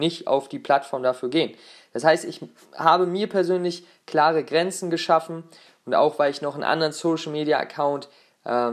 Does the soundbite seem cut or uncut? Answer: uncut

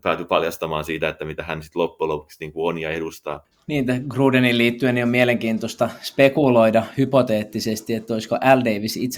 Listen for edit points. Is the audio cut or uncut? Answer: uncut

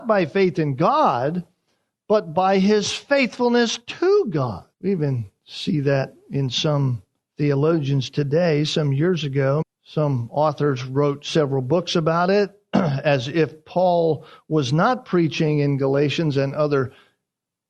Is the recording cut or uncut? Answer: cut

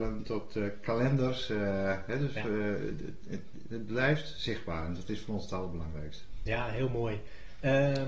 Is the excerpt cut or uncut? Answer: uncut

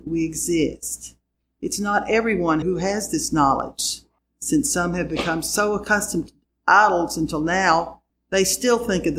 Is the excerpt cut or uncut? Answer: cut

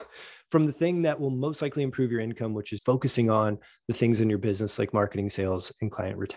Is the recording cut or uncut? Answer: cut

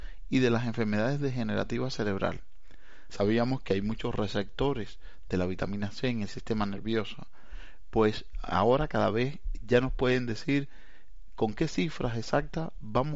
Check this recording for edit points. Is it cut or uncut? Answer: uncut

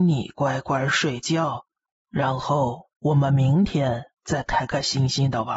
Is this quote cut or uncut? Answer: uncut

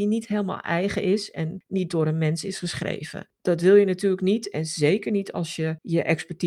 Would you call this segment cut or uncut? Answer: uncut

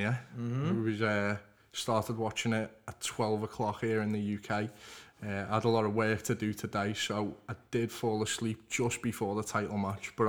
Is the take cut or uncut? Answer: uncut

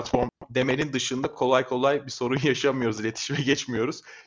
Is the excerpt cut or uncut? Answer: uncut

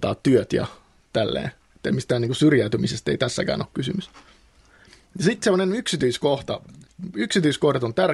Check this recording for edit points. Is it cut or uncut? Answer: uncut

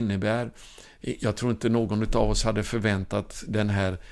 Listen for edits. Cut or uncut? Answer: uncut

